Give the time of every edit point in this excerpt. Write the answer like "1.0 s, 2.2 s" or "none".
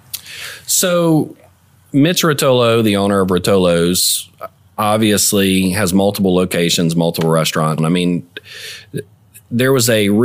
7.8 s

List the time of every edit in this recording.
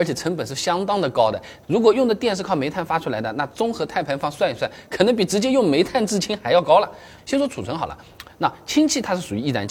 1.6 s, 7.2 s

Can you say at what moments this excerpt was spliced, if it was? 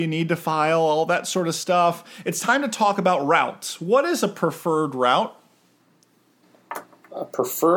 none

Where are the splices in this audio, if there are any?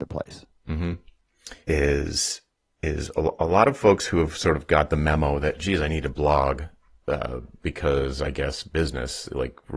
1.6 s

